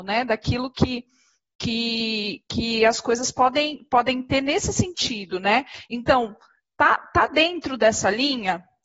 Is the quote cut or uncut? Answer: uncut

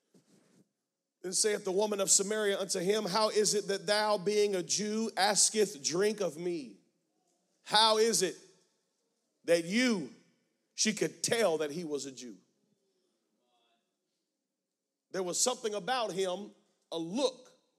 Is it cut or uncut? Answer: uncut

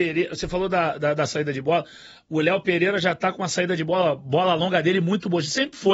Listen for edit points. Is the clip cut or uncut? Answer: uncut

